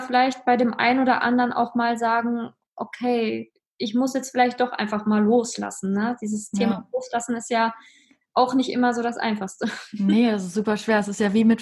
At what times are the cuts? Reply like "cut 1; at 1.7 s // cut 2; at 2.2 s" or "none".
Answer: none